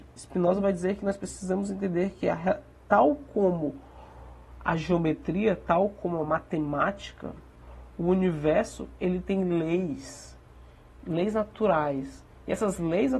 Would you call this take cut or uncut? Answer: uncut